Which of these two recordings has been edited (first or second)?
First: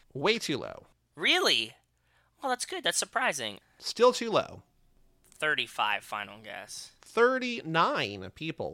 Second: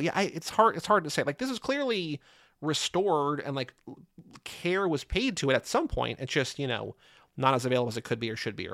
first